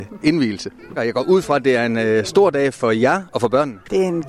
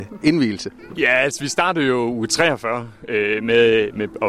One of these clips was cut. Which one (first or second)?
first